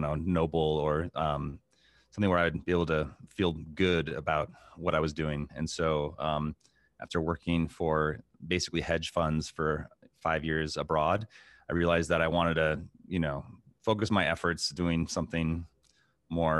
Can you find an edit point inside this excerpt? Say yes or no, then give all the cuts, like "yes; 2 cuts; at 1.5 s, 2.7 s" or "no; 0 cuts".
yes; 1 cut; at 5.5 s